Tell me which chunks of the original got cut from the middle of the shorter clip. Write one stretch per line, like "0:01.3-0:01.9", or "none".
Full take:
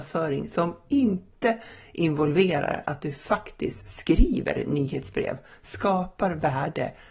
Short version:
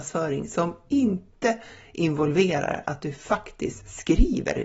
none